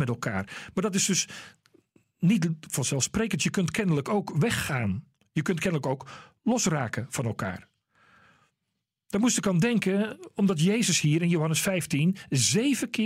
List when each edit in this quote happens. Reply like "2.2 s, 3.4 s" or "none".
none